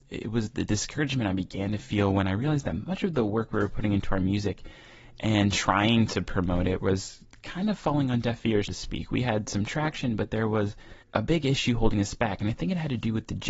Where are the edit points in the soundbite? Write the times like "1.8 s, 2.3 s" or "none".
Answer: 8.7 s, 11.0 s